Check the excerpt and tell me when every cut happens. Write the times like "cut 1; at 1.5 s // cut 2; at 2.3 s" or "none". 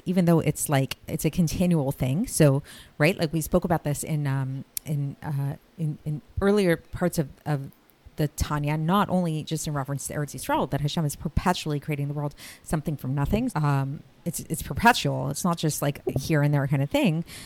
cut 1; at 10.7 s // cut 2; at 13.5 s

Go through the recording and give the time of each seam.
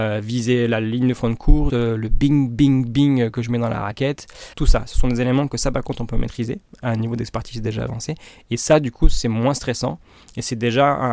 cut 1; at 1.7 s // cut 2; at 4.5 s

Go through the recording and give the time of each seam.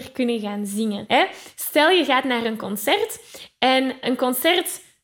cut 1; at 1.1 s // cut 2; at 4.0 s

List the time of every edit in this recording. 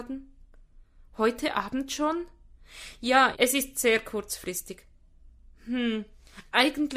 cut 1; at 3.3 s

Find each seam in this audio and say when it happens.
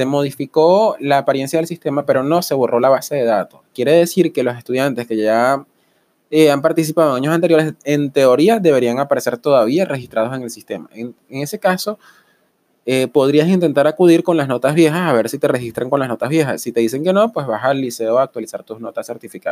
none

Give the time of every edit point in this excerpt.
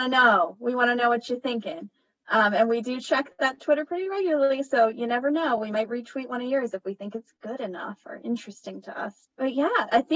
none

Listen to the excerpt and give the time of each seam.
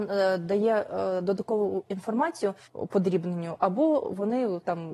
cut 1; at 2.6 s

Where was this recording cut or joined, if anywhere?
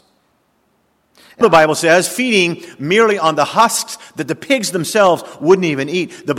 cut 1; at 1.4 s

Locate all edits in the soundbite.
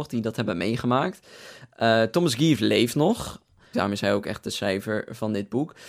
cut 1; at 3.7 s

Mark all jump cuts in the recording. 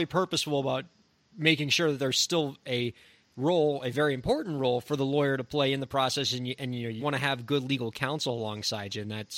cut 1; at 7.0 s

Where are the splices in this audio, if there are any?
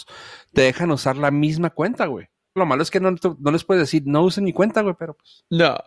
cut 1; at 2.6 s

